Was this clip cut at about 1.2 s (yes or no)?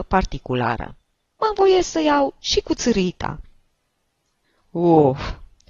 yes